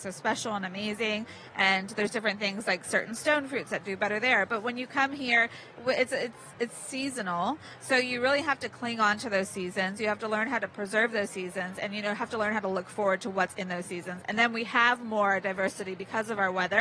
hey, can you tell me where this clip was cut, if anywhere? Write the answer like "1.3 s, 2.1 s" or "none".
none